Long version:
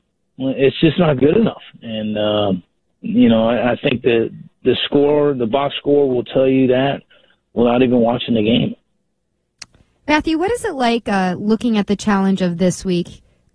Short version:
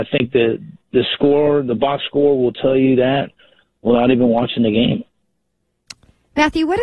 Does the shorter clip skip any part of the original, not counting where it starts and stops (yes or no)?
no